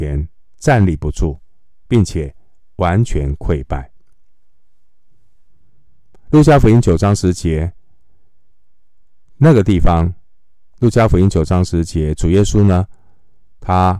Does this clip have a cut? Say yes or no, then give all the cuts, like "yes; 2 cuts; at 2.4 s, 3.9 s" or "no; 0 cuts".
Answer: no; 0 cuts